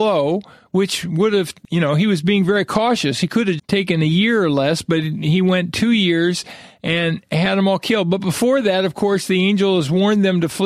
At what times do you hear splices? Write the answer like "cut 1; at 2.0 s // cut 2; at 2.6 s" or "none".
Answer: cut 1; at 3.6 s